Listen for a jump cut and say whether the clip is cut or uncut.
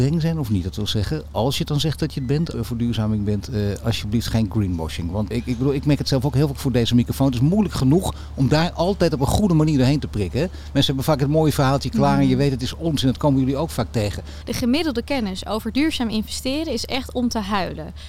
cut